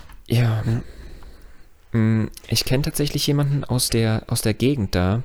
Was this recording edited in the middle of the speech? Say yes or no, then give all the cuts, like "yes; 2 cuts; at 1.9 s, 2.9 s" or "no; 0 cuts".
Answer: no; 0 cuts